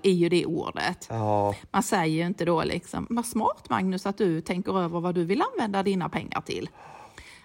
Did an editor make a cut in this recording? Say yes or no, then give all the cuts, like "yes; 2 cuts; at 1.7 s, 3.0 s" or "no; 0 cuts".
yes; 1 cut; at 3.1 s